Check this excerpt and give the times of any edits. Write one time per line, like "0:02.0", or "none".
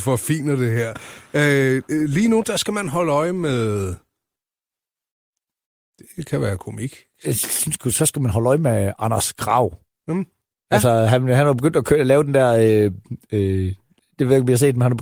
none